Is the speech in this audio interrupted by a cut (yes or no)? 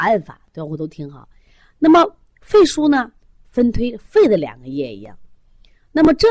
yes